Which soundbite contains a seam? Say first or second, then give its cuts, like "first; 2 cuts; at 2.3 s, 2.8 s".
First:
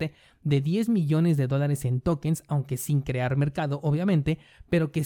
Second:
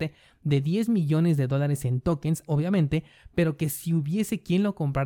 second; 1 cut; at 2.5 s